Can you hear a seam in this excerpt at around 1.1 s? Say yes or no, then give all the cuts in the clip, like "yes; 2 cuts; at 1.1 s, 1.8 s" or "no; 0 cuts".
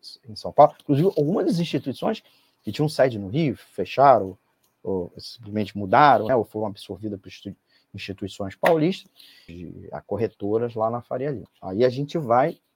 no; 3 cuts; at 6.3 s, 9.5 s, 11.5 s